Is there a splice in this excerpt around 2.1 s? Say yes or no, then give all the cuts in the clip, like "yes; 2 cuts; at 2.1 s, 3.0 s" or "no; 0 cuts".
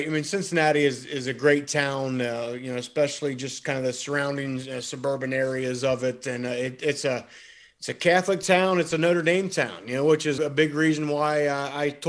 no; 1 cut; at 10.4 s